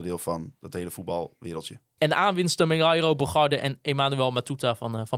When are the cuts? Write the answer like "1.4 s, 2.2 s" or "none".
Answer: 2.0 s